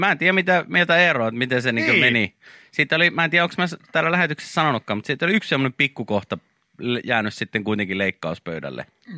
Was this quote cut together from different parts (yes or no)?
no